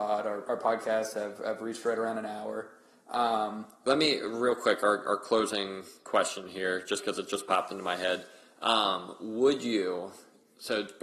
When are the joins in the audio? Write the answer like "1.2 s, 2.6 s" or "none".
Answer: none